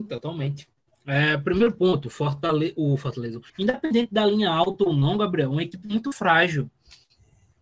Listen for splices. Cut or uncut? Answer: cut